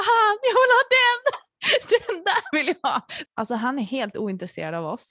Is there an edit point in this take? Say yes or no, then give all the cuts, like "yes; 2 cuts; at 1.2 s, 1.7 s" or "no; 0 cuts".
yes; 1 cut; at 3.3 s